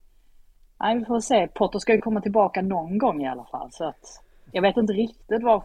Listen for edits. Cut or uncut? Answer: uncut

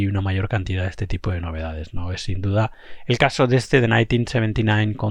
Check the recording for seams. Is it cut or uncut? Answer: uncut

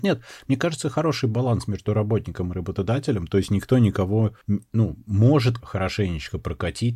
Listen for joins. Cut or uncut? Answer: cut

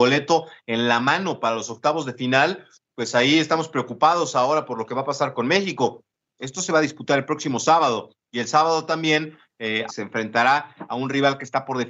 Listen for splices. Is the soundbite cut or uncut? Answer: cut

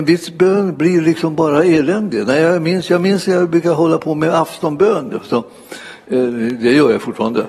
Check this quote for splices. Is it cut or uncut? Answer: uncut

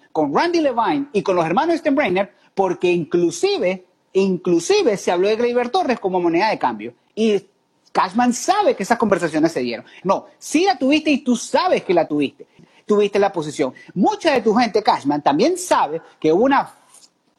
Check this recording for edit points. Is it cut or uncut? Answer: cut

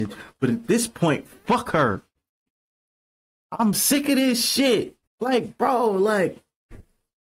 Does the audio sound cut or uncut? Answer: cut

